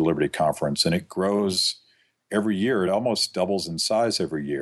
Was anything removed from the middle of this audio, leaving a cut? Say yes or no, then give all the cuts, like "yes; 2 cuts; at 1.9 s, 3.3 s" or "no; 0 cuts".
no; 0 cuts